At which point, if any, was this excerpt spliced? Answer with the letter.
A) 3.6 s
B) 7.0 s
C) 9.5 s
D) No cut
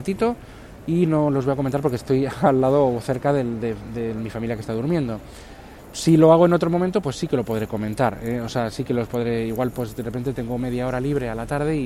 D